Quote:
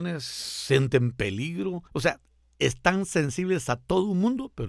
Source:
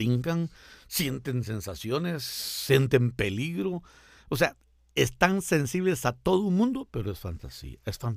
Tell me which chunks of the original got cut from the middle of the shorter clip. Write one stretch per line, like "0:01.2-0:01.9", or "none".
0:03.9-0:04.2